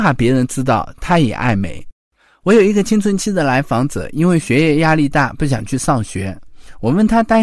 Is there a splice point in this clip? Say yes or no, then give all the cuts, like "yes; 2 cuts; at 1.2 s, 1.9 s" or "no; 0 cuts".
no; 0 cuts